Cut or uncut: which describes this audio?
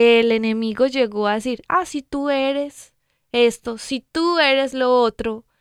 uncut